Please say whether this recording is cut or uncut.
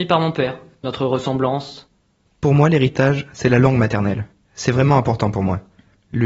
cut